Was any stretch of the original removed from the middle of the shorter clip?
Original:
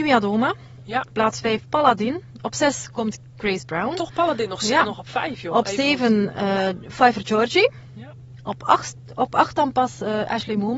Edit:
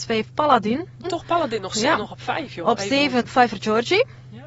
yes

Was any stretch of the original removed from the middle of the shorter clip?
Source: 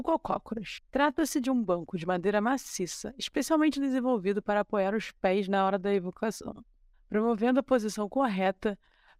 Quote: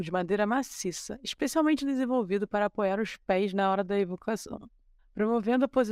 no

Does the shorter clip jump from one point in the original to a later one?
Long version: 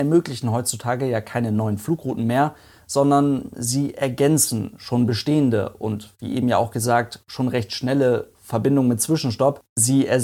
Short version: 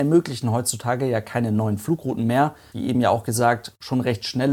yes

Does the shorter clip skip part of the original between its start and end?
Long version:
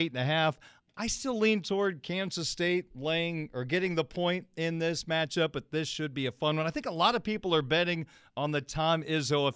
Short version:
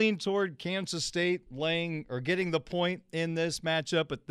no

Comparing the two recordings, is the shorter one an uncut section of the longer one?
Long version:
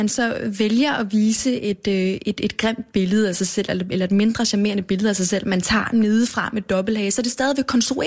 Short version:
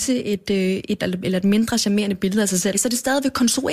no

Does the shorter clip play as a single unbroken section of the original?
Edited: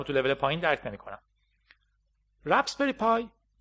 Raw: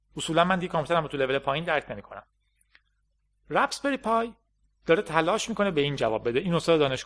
yes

